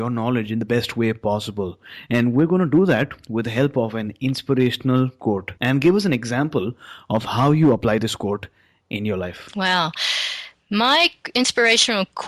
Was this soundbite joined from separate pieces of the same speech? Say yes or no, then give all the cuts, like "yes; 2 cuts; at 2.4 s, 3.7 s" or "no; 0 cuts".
yes; 1 cut; at 5.6 s